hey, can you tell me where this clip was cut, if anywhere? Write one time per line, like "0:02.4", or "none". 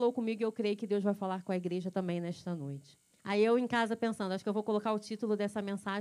0:03.2